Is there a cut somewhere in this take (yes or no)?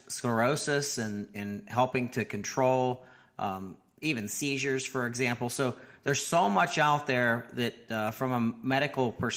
no